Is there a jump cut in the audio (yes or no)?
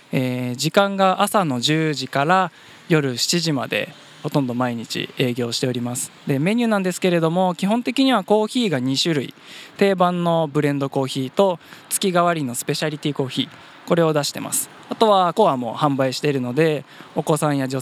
yes